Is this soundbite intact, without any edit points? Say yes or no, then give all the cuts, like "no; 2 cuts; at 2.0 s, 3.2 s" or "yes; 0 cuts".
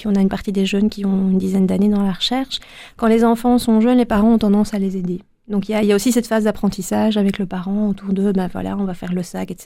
yes; 0 cuts